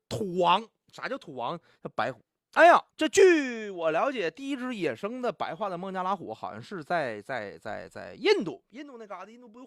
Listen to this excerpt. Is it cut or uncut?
cut